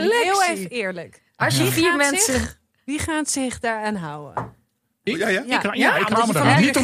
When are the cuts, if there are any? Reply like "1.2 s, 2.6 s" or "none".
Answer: 4.9 s

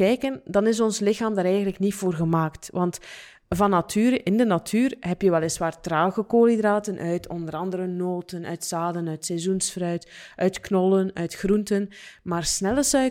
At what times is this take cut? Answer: none

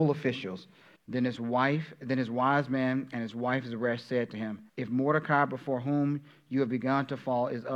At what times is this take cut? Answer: 1.0 s, 4.7 s

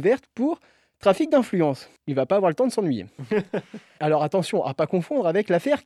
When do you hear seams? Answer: 2.0 s, 4.0 s

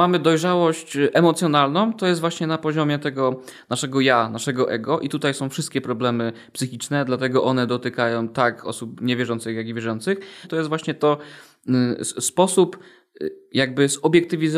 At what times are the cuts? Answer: 10.4 s

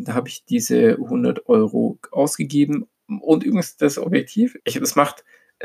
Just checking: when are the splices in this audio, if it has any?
4.6 s

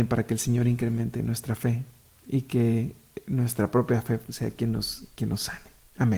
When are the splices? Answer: none

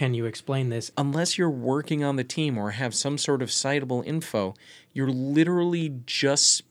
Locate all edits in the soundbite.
0.9 s

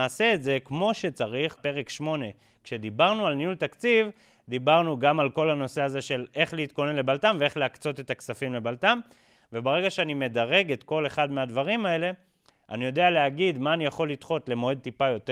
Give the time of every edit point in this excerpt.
1.6 s, 9.4 s

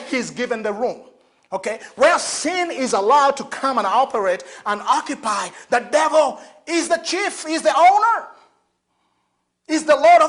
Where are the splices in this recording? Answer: none

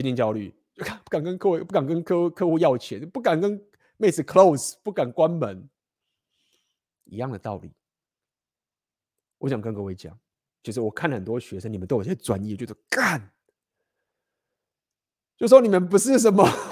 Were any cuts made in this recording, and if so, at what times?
none

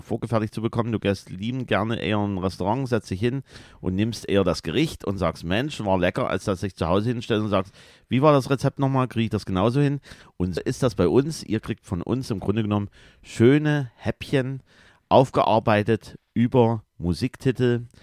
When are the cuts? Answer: 10.6 s

